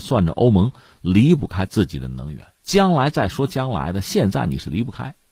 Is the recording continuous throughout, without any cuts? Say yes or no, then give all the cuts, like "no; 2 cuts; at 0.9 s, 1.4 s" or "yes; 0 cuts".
yes; 0 cuts